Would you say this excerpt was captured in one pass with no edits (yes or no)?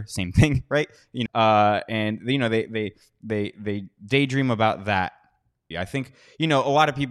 no